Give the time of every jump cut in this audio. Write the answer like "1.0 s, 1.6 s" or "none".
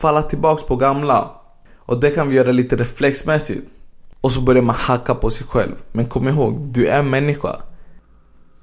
4.2 s